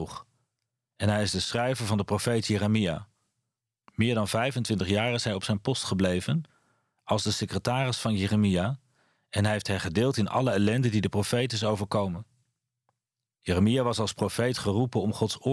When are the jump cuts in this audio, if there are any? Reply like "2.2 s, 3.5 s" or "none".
3.8 s